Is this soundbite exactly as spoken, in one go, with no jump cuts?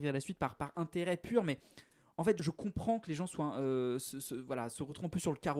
no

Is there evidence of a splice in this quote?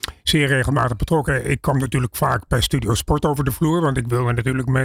yes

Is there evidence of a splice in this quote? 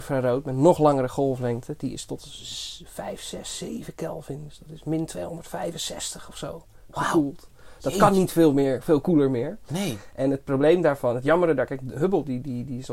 no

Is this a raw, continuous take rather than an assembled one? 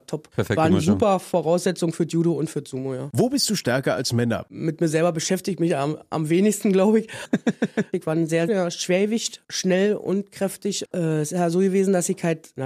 no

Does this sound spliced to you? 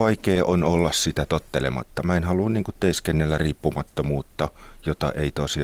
no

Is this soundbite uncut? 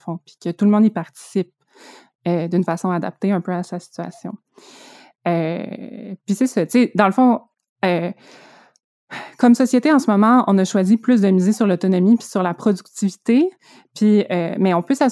yes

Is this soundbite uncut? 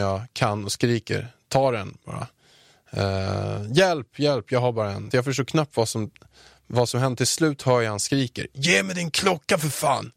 no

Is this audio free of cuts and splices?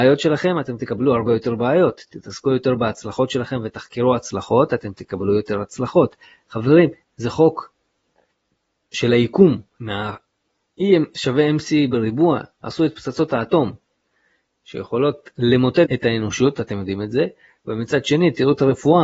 no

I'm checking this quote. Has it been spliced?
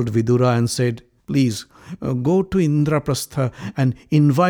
yes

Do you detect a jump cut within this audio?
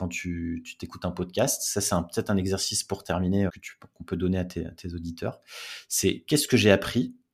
yes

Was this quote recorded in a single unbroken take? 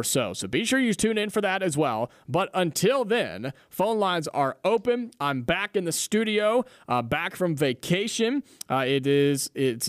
yes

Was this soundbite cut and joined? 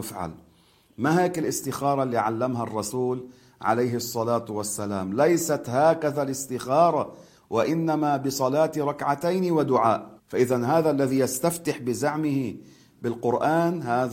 yes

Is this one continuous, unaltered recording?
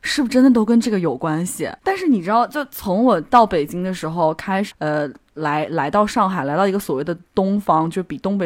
no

